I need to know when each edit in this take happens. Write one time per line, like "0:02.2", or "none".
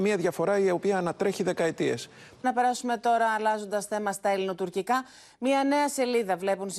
0:02.4